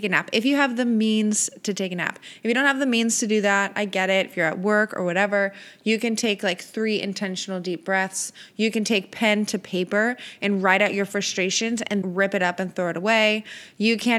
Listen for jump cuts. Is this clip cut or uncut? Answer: cut